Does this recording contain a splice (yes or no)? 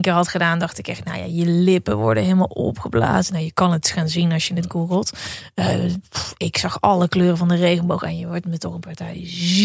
no